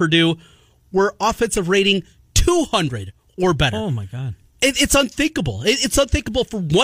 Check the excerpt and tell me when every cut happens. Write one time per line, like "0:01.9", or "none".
none